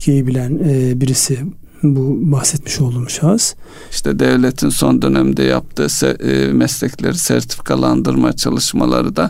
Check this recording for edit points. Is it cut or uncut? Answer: cut